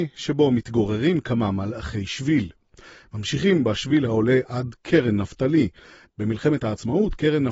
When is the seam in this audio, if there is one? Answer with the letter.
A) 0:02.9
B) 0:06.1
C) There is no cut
B